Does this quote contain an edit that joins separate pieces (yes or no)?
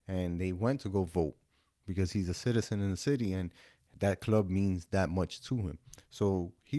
no